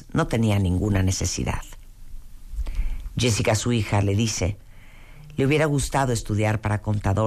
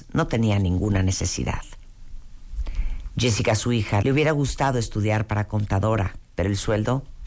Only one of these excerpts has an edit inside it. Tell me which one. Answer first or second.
second